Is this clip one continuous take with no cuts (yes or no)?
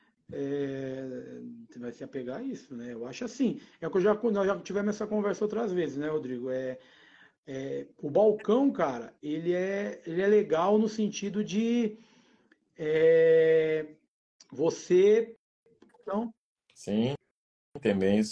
no